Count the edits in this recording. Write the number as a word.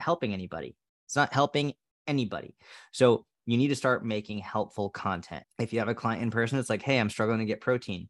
one